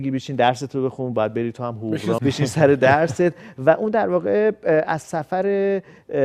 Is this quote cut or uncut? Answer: cut